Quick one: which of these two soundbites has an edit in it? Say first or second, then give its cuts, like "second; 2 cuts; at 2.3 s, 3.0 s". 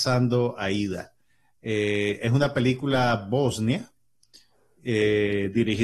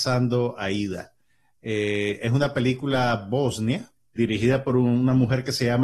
second; 1 cut; at 4.2 s